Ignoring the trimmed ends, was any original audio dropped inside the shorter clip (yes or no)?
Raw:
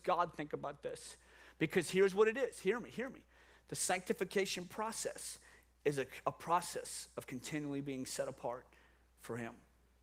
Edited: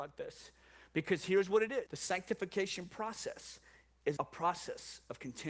yes